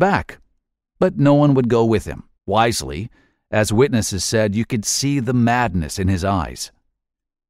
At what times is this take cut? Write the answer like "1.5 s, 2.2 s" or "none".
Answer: 2.3 s